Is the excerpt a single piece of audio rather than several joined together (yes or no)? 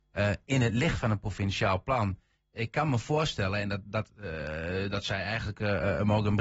yes